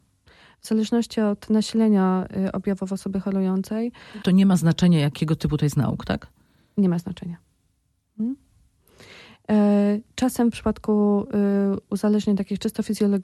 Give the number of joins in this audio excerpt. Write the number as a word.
zero